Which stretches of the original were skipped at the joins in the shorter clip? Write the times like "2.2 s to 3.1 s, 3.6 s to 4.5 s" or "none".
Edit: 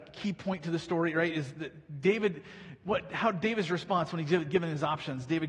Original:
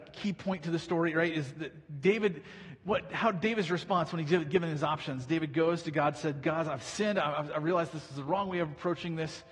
none